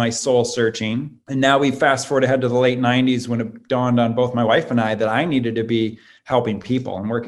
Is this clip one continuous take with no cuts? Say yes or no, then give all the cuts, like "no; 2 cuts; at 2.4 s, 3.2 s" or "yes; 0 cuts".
no; 1 cut; at 1.2 s